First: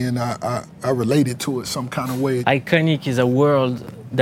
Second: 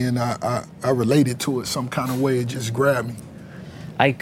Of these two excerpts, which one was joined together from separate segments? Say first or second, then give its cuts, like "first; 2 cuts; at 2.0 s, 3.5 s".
first; 1 cut; at 2.4 s